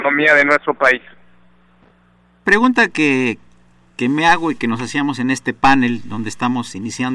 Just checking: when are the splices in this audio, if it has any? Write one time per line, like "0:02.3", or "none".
none